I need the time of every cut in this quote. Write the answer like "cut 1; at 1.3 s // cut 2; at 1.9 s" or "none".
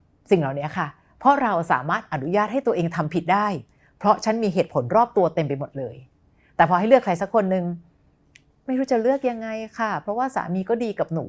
none